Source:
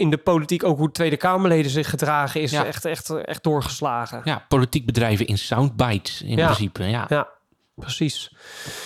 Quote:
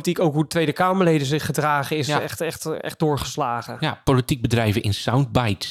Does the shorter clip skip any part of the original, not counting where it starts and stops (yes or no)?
no